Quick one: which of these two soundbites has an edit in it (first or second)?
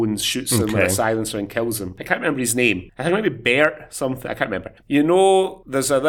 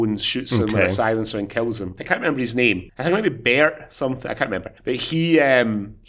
first